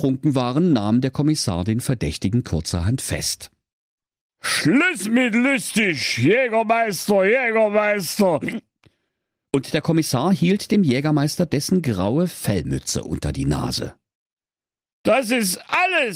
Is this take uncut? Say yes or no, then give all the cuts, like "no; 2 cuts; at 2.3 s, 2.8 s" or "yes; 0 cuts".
yes; 0 cuts